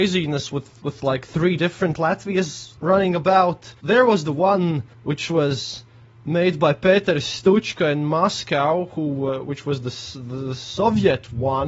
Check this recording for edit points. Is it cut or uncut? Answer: uncut